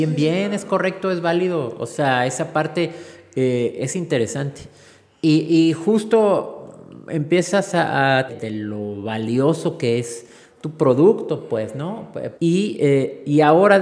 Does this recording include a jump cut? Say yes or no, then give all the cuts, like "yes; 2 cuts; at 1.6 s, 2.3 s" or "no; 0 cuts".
yes; 2 cuts; at 8.3 s, 12.4 s